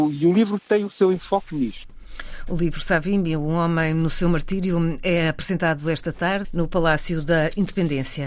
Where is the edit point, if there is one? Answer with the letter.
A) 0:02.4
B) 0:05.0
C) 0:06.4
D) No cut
C